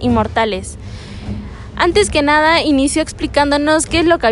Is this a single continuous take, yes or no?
yes